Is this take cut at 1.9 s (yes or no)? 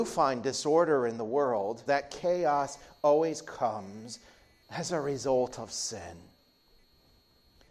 yes